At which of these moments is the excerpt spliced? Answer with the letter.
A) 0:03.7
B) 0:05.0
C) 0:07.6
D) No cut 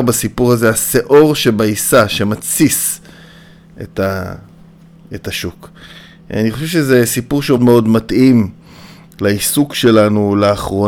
C